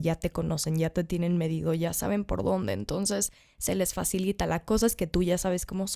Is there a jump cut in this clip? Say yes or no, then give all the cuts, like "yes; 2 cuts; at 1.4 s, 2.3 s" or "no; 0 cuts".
no; 0 cuts